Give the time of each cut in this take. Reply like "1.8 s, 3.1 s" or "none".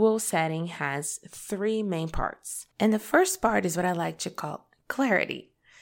2.7 s